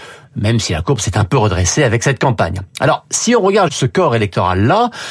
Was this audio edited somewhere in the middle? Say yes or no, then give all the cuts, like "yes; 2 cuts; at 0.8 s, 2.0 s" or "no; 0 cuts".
yes; 1 cut; at 3.7 s